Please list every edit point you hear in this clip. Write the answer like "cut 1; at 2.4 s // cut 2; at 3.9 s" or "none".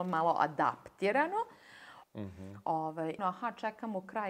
cut 1; at 2.0 s // cut 2; at 3.2 s